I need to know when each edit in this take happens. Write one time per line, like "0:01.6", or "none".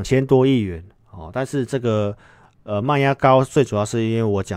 none